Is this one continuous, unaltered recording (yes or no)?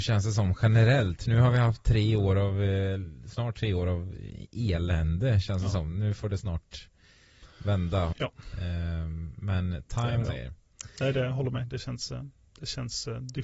no